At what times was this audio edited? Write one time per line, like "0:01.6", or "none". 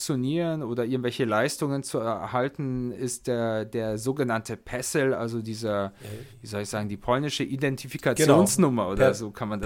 none